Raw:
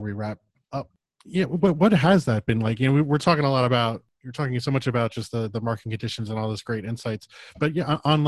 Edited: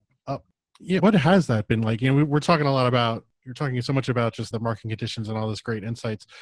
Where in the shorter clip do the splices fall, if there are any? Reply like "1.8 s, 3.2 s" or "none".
1.0 s, 4.5 s